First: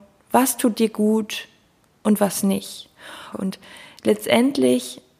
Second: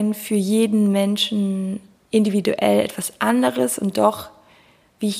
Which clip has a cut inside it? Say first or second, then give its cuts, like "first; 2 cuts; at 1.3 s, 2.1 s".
first; 1 cut; at 3.3 s